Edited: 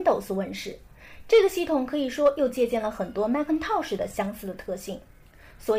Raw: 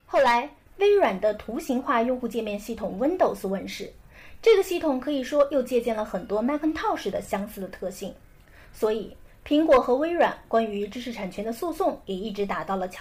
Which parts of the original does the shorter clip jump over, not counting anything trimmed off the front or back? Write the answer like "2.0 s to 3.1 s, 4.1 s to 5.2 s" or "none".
none